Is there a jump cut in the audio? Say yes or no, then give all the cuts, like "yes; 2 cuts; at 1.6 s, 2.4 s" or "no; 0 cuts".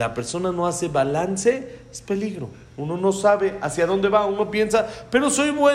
no; 0 cuts